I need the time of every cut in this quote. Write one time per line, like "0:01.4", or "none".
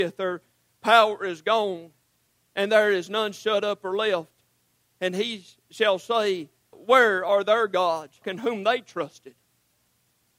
0:06.7
0:08.2